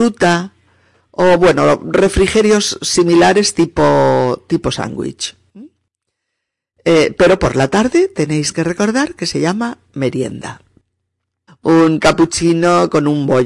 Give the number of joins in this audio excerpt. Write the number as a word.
one